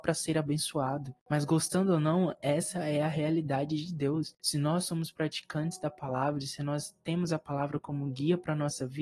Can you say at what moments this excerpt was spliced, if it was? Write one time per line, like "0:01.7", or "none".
0:01.2